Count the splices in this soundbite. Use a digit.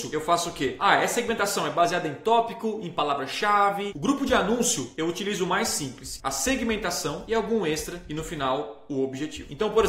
2